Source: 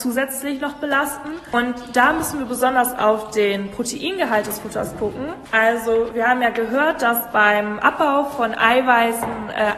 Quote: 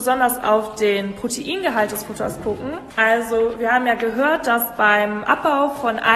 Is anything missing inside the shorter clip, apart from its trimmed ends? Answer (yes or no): no